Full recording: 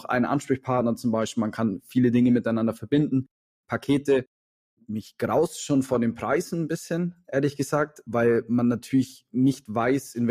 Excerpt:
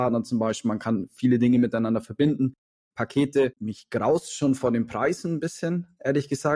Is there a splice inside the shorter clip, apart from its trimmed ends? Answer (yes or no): yes